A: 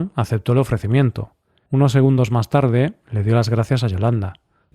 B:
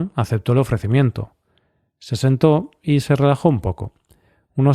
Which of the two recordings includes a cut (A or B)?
A